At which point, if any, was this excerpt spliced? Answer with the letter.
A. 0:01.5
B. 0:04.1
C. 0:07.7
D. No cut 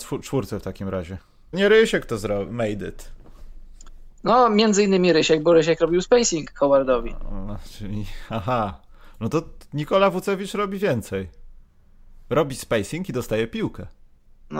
A